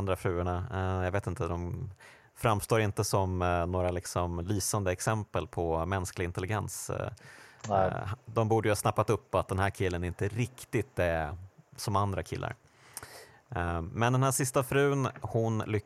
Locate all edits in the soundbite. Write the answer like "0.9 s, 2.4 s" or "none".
none